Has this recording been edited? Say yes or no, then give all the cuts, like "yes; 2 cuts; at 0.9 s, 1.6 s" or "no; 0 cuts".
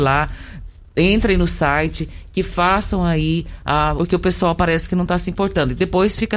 yes; 1 cut; at 4.0 s